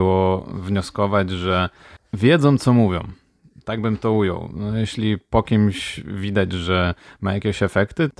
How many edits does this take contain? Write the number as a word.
zero